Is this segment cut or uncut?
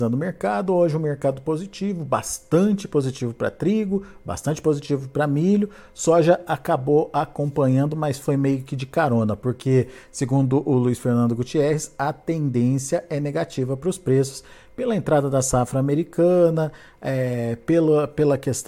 uncut